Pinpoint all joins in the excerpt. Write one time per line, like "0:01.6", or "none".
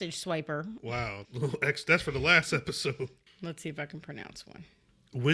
0:01.2
0:03.3